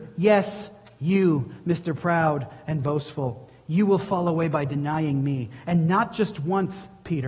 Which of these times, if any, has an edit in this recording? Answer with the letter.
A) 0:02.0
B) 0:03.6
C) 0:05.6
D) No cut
D